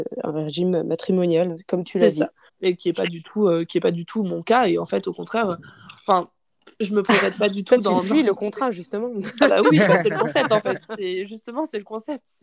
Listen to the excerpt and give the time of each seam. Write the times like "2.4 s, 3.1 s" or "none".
2.5 s, 9.6 s